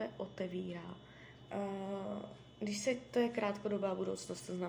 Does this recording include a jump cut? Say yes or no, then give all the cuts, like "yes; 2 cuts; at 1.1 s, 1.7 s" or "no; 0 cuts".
yes; 1 cut; at 1.5 s